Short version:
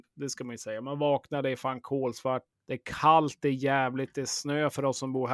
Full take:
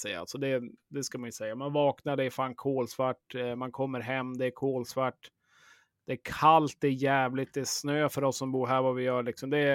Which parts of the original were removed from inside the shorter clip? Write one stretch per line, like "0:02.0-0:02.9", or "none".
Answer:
0:03.3-0:05.9